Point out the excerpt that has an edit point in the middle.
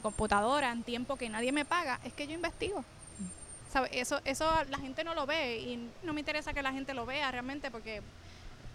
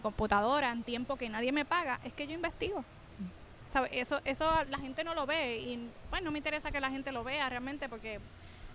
first; 1 cut; at 6.0 s

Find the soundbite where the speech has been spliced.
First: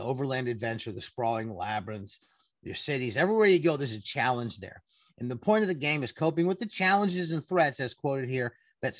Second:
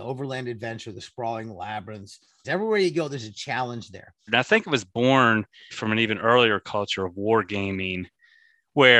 second; 3 cuts; at 2.4 s, 4.3 s, 5.7 s

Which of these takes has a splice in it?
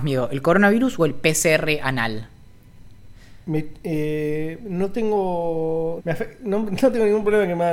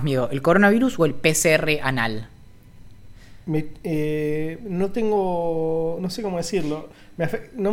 first; 1 cut; at 6.0 s

